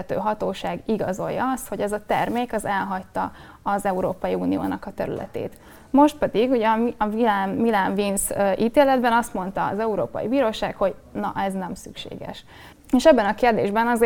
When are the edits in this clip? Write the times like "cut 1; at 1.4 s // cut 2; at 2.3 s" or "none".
cut 1; at 12.7 s